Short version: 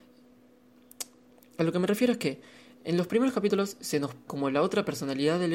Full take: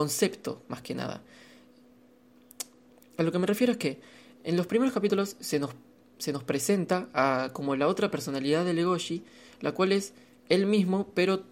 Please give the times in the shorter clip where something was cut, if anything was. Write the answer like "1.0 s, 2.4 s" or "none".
4.3 s